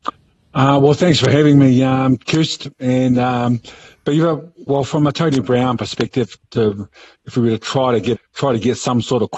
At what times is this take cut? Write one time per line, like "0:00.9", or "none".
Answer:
0:06.4
0:08.1